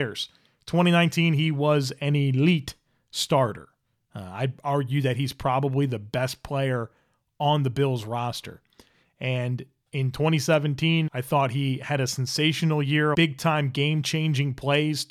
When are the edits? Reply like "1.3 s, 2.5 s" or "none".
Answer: 11.1 s, 13.1 s